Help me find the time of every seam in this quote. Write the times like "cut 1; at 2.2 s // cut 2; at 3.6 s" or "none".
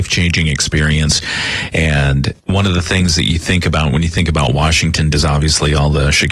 cut 1; at 2.4 s // cut 2; at 5.1 s